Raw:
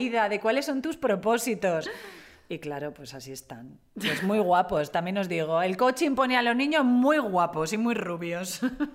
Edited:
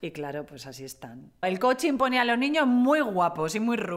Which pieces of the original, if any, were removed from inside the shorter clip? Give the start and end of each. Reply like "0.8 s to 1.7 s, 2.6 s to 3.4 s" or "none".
3.9 s to 5.6 s

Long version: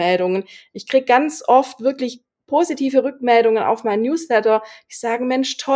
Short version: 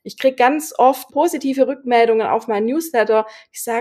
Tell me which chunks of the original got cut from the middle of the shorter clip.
1.8 s to 2.4 s

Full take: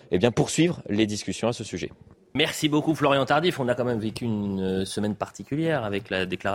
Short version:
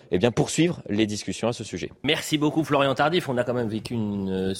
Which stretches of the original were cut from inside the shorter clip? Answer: 2.0 s to 2.3 s

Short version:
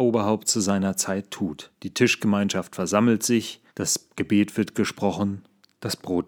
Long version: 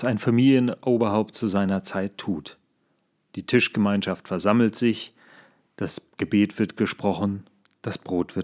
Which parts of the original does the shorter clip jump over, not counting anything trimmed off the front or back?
2.6 s to 3.3 s, 5.2 s to 5.7 s

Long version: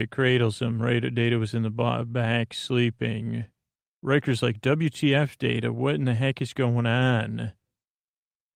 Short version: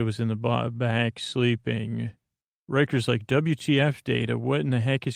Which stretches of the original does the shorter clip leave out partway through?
none

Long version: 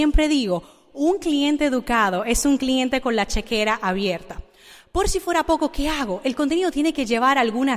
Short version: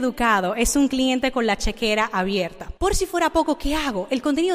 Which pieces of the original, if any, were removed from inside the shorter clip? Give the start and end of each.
4.5 s to 4.9 s

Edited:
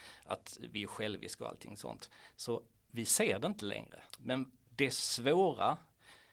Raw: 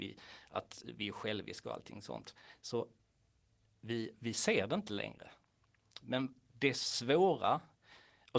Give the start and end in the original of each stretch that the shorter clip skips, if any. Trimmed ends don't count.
3.1 s to 4.2 s, 5.4 s to 5.9 s

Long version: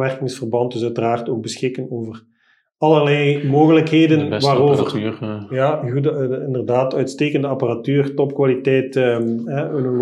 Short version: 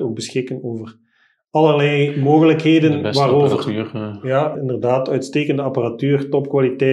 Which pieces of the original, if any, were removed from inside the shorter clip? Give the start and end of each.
5.8 s to 6.4 s

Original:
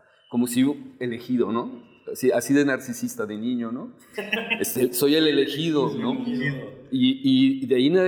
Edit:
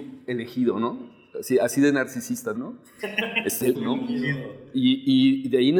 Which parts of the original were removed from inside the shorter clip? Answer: 3.3 s to 3.7 s, 4.9 s to 5.9 s

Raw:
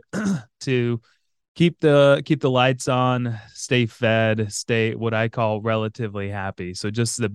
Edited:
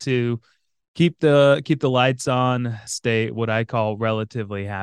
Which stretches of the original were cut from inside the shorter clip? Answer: 3.5 s to 4.5 s

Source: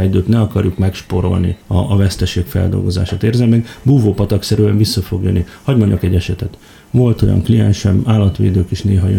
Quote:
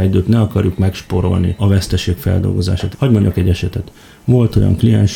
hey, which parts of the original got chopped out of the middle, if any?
1.6 s to 1.9 s, 3.2 s to 5.6 s

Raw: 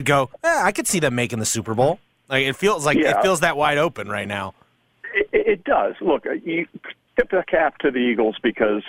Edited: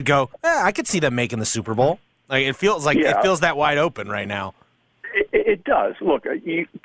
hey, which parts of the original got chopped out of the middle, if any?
none

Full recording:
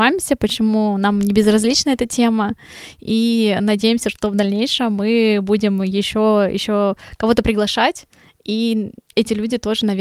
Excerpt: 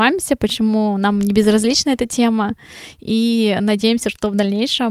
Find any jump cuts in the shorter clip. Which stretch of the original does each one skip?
none

